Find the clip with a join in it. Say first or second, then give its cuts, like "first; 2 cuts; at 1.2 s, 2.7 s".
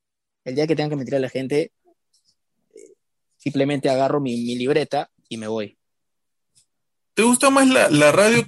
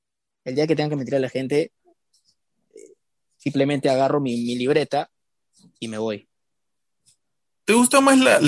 first; 1 cut; at 5.2 s